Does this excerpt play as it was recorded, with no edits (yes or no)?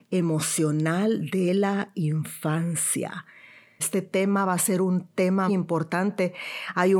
no